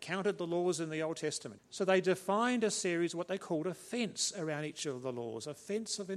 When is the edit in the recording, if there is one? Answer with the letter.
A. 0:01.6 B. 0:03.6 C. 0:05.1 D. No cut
A